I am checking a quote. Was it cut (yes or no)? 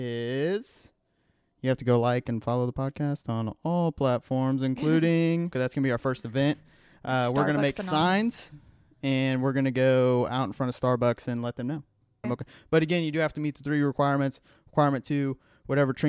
yes